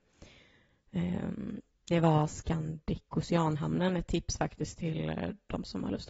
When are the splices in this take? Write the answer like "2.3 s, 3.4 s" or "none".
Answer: none